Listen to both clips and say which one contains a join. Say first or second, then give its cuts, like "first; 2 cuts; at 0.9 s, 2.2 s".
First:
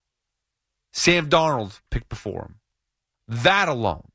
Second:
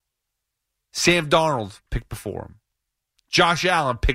first; 1 cut; at 3.1 s